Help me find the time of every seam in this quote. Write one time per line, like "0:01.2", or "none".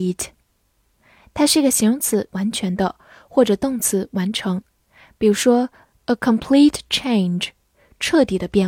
0:02.3